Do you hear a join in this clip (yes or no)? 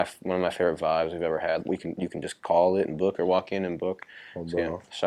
yes